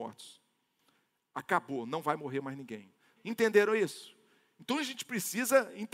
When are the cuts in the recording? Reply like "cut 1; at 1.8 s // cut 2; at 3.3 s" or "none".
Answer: cut 1; at 3.2 s